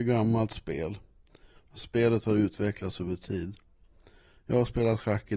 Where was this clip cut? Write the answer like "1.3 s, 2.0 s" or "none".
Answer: 1.6 s